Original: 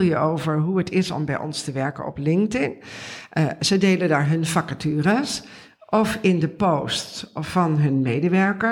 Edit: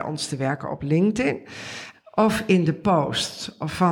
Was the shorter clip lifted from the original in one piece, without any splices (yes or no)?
no